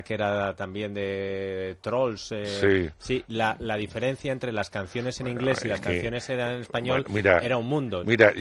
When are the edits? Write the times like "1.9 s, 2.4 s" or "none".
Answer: none